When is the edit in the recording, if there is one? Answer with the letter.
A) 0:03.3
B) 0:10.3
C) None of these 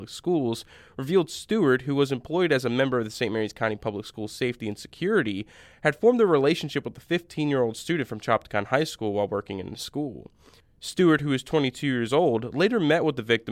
C